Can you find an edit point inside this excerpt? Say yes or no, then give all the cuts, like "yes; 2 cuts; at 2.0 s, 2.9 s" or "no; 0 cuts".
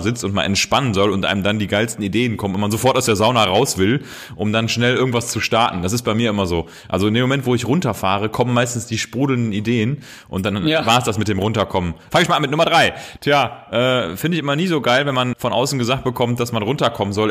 yes; 3 cuts; at 12.1 s, 13.2 s, 15.3 s